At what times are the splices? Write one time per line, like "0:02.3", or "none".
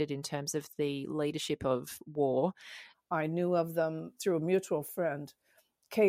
0:02.9
0:04.2